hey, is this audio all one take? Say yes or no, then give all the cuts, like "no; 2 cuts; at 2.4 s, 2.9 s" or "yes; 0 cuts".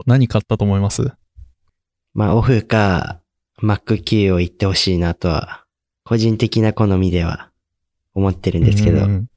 yes; 0 cuts